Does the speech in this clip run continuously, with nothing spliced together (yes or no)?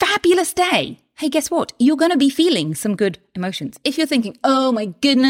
yes